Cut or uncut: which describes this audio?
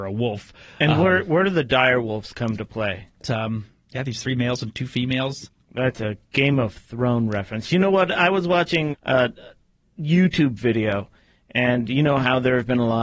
cut